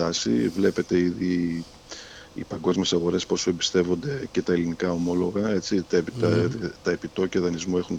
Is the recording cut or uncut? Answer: uncut